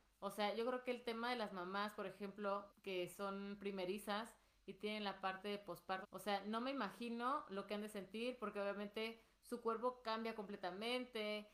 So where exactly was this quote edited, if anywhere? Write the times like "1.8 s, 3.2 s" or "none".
2.7 s, 6.0 s